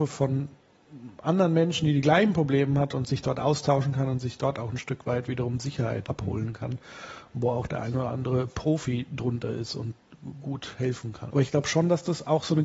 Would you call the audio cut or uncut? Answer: cut